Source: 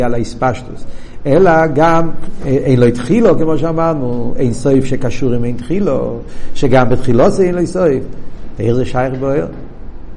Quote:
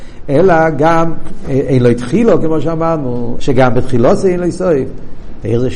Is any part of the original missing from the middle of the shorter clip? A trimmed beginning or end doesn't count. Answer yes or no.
yes